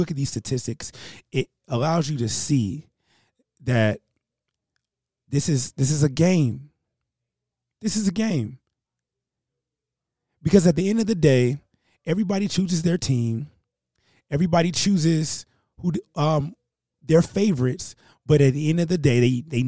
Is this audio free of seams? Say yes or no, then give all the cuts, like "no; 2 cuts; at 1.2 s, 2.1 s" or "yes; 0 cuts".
yes; 0 cuts